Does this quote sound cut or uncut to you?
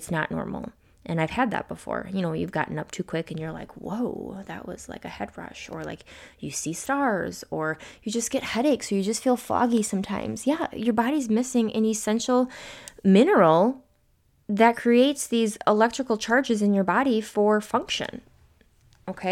uncut